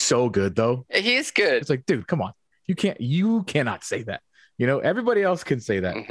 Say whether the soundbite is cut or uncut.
cut